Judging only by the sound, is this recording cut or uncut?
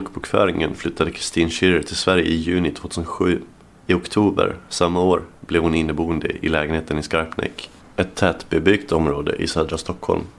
uncut